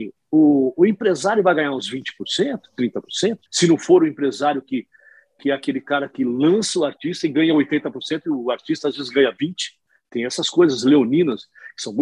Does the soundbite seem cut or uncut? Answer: cut